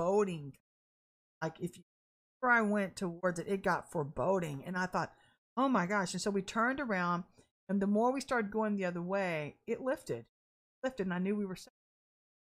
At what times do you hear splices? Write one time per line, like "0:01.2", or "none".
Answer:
none